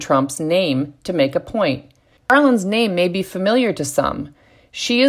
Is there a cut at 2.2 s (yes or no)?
yes